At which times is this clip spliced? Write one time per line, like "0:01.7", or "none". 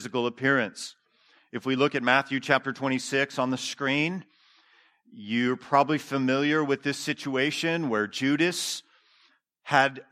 none